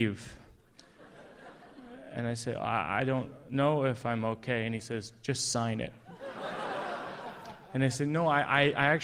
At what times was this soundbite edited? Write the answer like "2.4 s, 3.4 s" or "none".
none